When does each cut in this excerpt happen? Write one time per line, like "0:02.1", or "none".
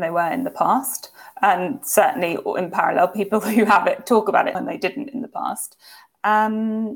0:04.5